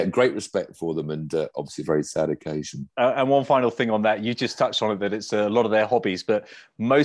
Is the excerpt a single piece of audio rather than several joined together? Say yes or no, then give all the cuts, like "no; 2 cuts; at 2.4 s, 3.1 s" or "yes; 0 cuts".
yes; 0 cuts